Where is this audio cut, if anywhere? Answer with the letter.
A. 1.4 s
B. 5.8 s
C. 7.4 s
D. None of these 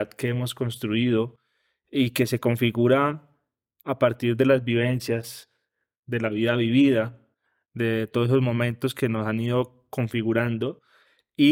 D